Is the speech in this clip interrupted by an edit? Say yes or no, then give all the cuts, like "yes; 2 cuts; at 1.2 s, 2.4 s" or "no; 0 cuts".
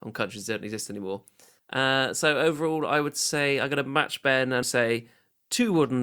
yes; 2 cuts; at 1.6 s, 4.6 s